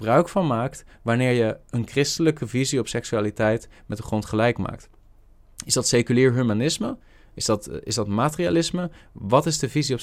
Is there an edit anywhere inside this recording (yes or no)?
no